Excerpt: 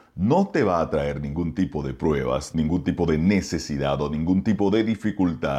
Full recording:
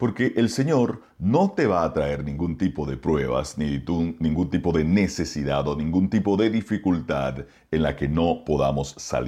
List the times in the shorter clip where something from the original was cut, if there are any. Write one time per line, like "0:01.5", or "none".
0:02.5